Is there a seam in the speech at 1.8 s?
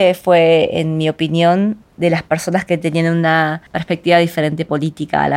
yes; 2 cuts; at 1.8 s, 3.7 s

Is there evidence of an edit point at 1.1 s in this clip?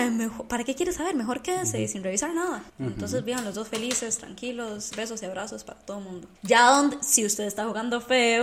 no; 3 cuts; at 2.7 s, 4.9 s, 6.4 s

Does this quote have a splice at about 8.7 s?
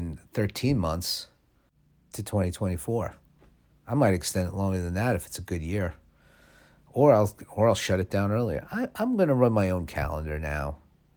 no; 0 cuts

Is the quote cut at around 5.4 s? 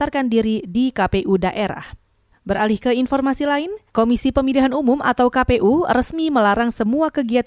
no; 2 cuts; at 2.3 s, 3.9 s

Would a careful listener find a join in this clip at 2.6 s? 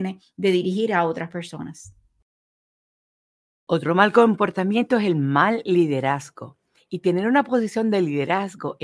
no; 1 cut; at 6.8 s

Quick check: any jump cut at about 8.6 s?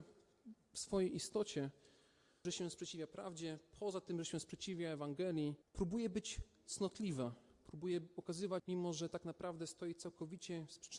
yes; 3 cuts; at 2.4 s, 5.6 s, 8.6 s

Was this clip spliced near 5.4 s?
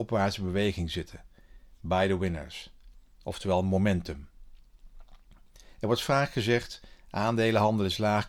no; 0 cuts

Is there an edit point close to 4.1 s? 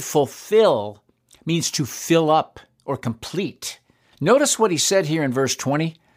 yes; 1 cut; at 4.1 s

